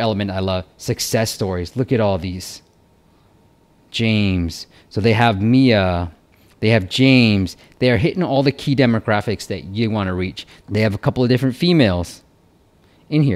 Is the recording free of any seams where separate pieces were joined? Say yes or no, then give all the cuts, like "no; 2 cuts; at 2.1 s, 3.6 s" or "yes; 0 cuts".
no; 1 cut; at 10.6 s